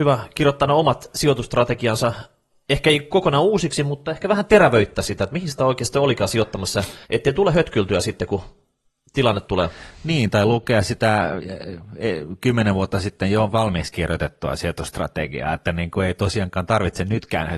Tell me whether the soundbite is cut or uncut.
cut